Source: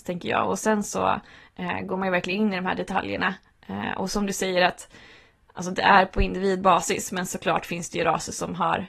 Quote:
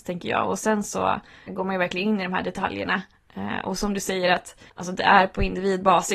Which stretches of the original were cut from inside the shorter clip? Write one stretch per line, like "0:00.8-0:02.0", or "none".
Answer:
0:01.5-0:01.8
0:05.0-0:05.5